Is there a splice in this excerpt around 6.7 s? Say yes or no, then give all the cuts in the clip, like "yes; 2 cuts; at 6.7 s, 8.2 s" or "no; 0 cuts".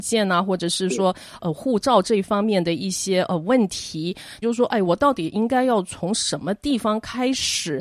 no; 2 cuts; at 1.4 s, 4.4 s